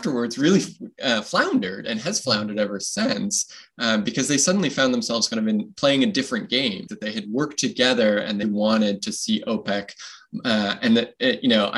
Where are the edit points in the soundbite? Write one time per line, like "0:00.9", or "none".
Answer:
0:06.9
0:08.4